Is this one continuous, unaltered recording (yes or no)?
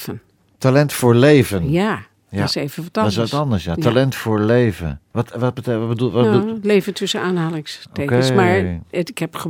yes